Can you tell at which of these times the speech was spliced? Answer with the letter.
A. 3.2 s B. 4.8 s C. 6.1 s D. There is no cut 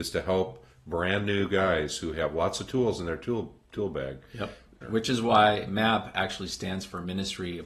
B